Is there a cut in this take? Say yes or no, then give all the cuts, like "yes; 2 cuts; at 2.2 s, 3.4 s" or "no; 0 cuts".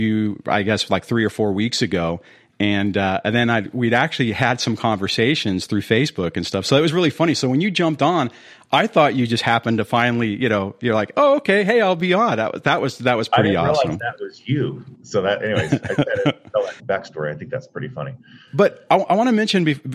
yes; 1 cut; at 16.8 s